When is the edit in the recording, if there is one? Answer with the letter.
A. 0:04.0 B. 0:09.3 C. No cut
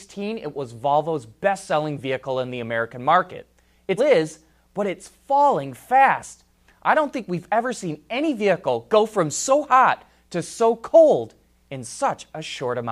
A